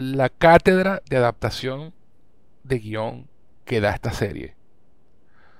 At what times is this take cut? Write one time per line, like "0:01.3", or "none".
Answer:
none